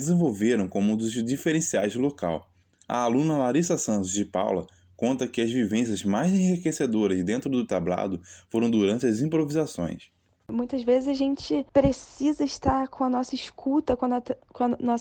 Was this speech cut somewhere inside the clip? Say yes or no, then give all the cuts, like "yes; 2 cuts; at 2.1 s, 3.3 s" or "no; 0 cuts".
no; 0 cuts